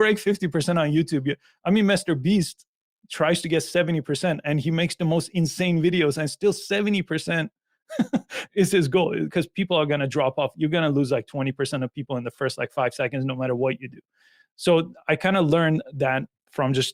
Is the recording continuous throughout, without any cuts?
yes; 0 cuts

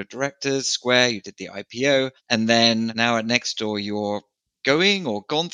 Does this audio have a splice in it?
no; 0 cuts

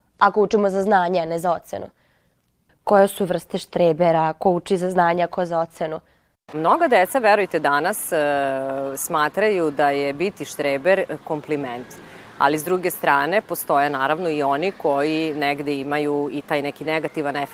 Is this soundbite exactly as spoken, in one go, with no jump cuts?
no; 2 cuts; at 2.7 s, 6.3 s

